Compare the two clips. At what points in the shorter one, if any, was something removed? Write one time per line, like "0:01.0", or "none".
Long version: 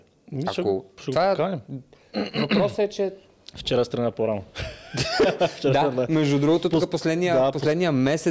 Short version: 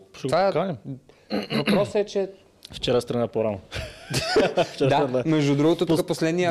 none